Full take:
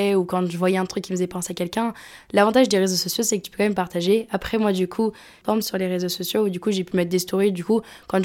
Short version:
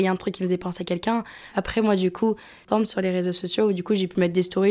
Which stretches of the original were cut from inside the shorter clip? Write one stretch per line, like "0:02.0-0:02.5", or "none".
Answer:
0:02.2-0:04.3